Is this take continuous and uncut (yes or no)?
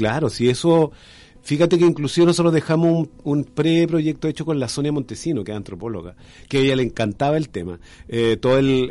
yes